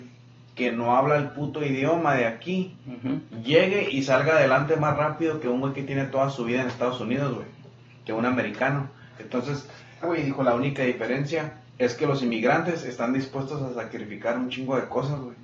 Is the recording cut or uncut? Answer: cut